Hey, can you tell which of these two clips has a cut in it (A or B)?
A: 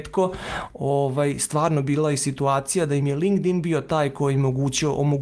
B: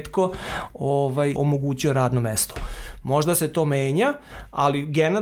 B